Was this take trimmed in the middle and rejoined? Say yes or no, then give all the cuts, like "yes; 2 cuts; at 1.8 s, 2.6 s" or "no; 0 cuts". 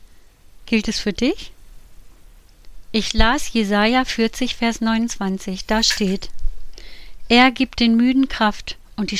no; 0 cuts